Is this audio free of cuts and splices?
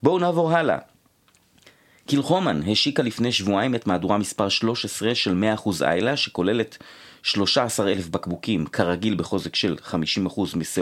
yes; 0 cuts

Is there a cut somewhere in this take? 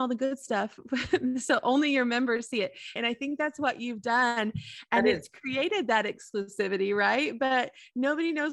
yes; 1 cut; at 3.0 s

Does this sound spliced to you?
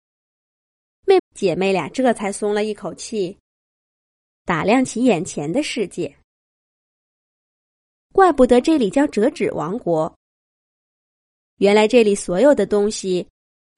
yes; 1 cut; at 1.2 s

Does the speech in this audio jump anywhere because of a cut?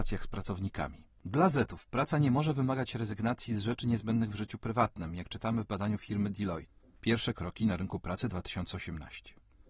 no; 0 cuts

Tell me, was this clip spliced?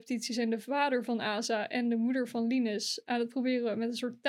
no; 0 cuts

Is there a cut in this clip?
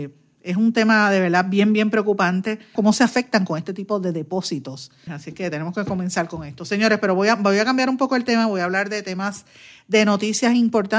yes; 2 cuts; at 2.8 s, 5.1 s

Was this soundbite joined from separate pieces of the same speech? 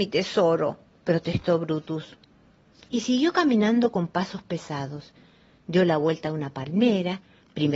no; 0 cuts

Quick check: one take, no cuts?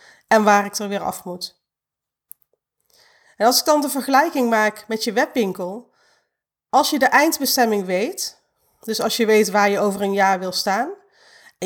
yes; 0 cuts

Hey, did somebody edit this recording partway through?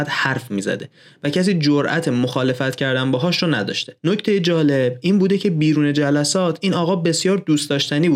yes; 1 cut; at 4.0 s

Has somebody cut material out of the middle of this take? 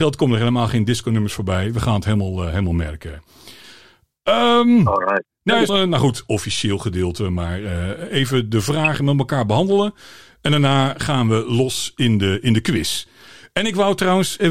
yes; 1 cut; at 5.7 s

